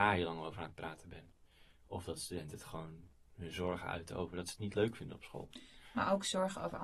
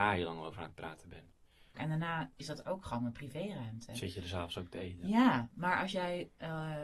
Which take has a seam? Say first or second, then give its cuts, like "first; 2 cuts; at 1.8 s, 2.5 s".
second; 1 cut; at 1.7 s